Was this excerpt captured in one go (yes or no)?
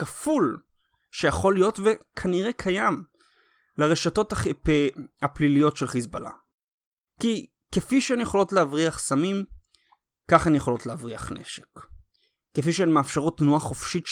yes